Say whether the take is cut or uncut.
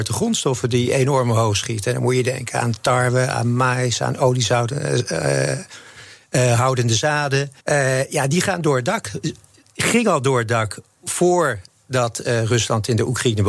cut